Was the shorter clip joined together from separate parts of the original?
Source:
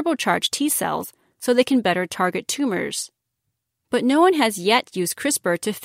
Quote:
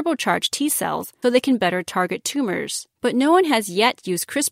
yes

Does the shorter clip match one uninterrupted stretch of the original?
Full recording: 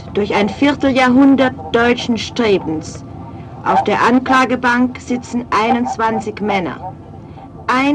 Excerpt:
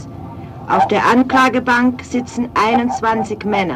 yes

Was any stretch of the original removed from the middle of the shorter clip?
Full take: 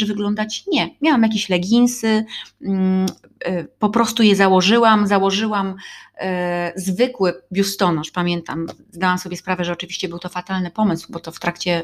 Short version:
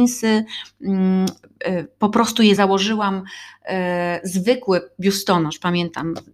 yes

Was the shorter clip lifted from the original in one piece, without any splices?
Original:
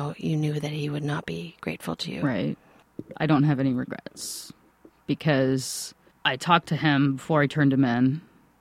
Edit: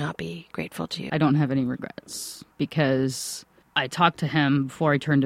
no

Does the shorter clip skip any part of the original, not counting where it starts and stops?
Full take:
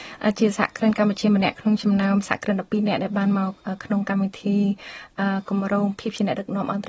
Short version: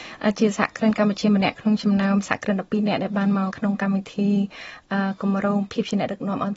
yes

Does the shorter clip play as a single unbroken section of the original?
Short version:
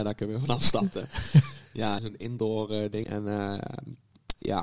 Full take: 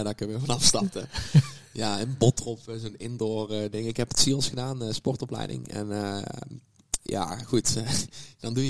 no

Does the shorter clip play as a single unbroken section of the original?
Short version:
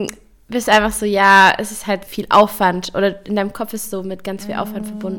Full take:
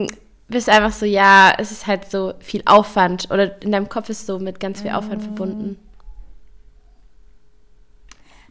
no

